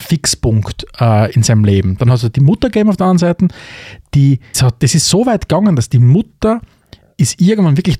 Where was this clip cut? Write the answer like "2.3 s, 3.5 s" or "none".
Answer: 2.0 s, 4.5 s